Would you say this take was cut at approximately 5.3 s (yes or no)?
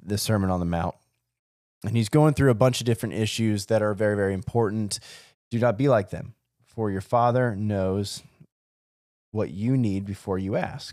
yes